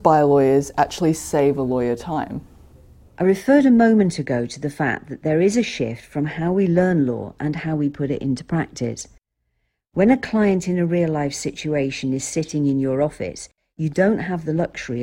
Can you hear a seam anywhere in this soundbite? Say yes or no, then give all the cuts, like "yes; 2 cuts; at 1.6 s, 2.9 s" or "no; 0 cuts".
no; 0 cuts